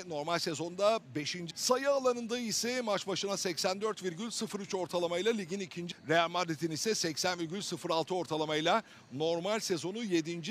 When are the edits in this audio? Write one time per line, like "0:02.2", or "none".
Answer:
0:01.5
0:05.9